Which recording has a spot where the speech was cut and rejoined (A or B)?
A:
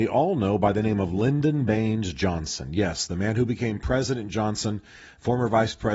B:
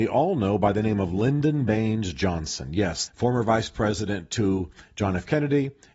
B